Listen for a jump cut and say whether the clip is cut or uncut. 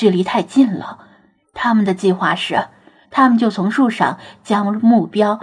cut